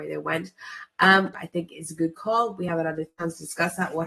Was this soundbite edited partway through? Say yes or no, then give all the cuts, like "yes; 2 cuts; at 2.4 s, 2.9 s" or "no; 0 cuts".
yes; 1 cut; at 1.3 s